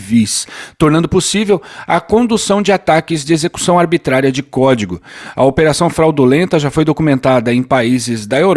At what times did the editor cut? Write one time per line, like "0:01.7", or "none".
0:05.3